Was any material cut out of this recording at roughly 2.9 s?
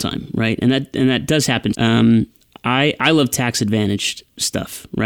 no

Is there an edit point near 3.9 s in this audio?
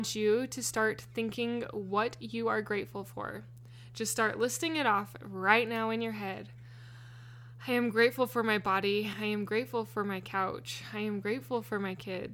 no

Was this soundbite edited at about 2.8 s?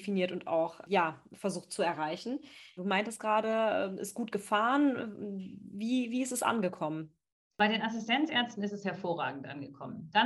yes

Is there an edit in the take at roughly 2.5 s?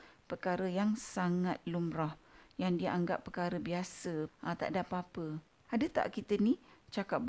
no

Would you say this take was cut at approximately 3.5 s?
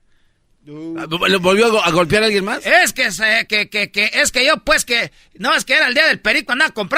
yes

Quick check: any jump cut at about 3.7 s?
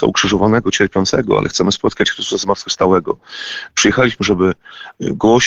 yes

